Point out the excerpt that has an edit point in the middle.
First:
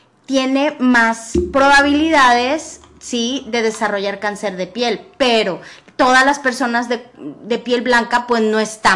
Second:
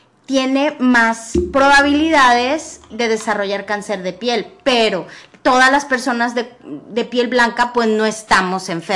second; 1 cut; at 2.9 s

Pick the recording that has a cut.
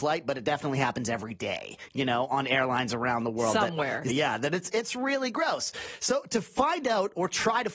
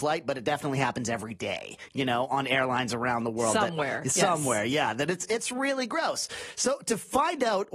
first; 1 cut; at 4.1 s

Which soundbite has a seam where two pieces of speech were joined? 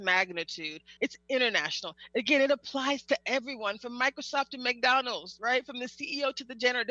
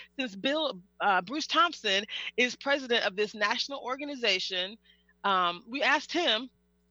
first; 1 cut; at 1.0 s

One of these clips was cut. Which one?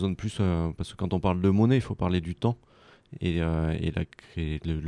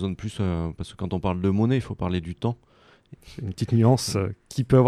second; 1 cut; at 3.1 s

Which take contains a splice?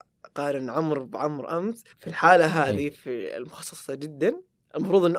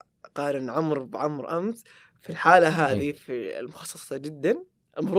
first; 1 cut; at 1.9 s

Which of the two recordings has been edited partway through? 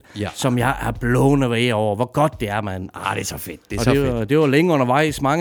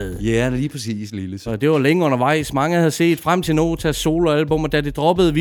second; 1 cut; at 1.5 s

